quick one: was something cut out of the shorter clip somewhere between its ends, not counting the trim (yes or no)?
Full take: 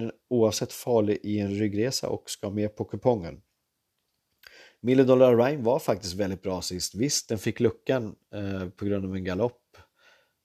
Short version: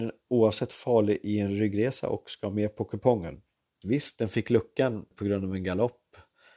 yes